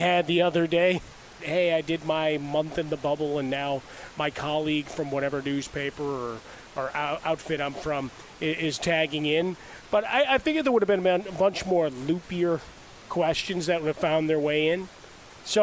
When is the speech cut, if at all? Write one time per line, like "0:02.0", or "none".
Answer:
0:01.4